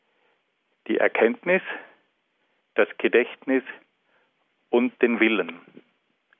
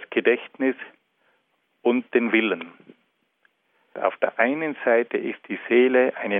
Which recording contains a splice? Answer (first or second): second